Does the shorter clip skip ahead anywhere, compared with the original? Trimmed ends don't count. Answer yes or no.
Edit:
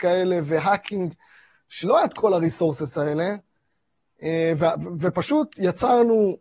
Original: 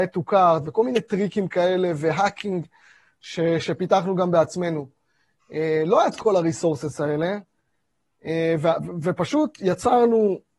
yes